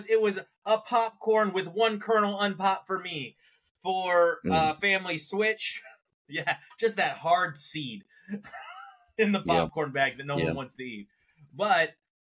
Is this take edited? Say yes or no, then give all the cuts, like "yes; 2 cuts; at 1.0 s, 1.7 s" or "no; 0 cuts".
no; 0 cuts